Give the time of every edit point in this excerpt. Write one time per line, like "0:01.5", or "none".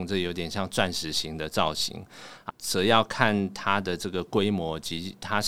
0:02.5